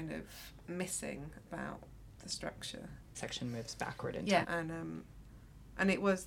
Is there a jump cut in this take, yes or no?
yes